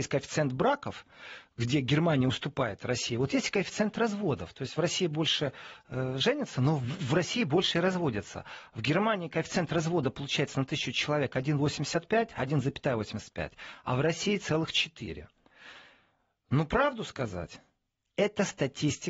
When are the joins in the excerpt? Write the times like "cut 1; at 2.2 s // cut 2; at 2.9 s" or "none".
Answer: none